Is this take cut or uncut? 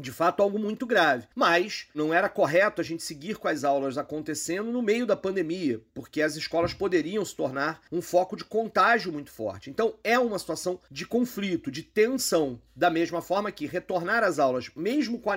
uncut